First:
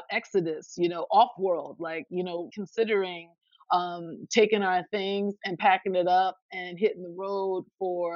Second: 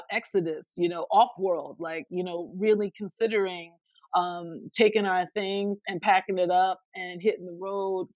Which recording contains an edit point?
first; 1 cut; at 2.5 s

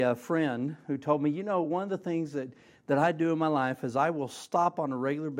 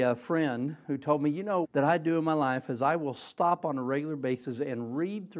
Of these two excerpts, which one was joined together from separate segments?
second; 1 cut; at 1.6 s

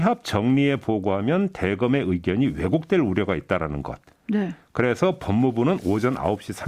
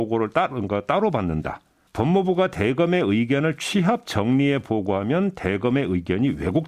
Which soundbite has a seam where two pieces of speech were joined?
second; 1 cut; at 1.9 s

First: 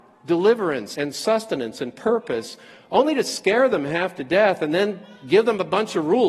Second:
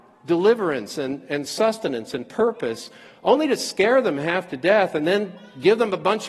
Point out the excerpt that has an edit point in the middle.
first; 1 cut; at 0.9 s

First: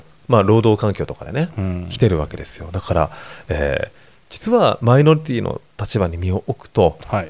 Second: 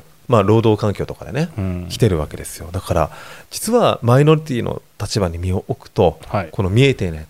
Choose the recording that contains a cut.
second; 1 cut; at 3.4 s

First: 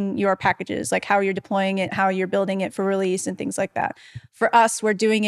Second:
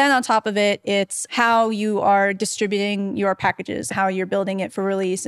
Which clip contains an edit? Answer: second; 2 cuts; at 1.3 s, 3.9 s

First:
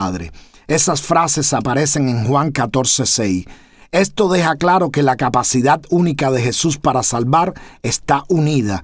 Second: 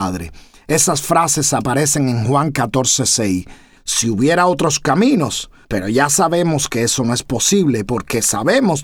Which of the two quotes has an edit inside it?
second; 2 cuts; at 3.8 s, 5.6 s

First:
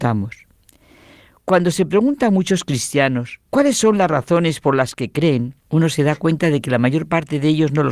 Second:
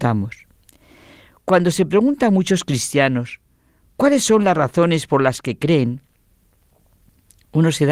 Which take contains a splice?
first; 2 cuts; at 3.4 s, 5.6 s

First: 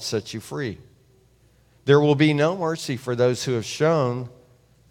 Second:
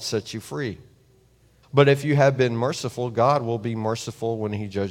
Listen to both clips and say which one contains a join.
second; 1 cut; at 1.6 s

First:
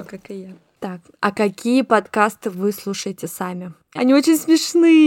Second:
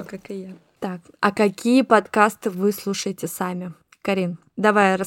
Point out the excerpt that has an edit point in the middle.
first; 1 cut; at 4.0 s

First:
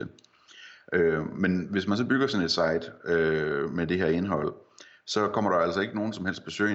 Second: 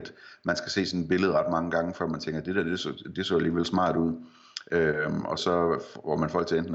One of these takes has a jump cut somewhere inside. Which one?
second; 1 cut; at 5.4 s

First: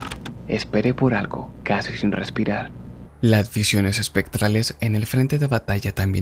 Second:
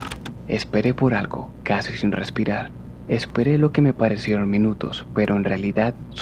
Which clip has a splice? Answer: first; 1 cut; at 3.1 s

